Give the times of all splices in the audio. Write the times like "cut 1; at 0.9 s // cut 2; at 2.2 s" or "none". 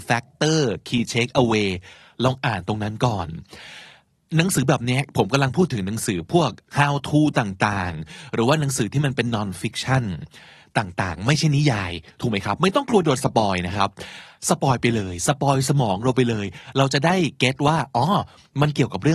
none